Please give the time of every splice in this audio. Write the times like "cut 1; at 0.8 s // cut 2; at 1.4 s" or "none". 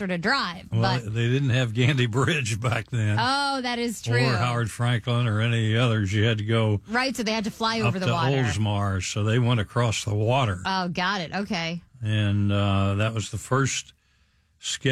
none